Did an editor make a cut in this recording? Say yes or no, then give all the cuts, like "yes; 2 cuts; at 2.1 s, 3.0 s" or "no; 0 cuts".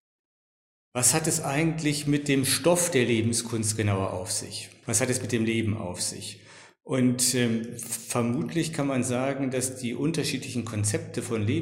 yes; 1 cut; at 4.8 s